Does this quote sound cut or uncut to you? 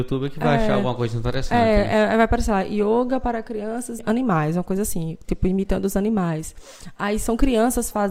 cut